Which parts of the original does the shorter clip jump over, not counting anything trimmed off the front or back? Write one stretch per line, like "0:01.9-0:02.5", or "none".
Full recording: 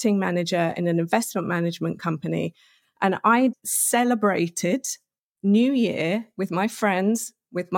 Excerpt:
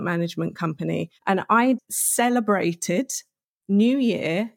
0:02.6-0:02.9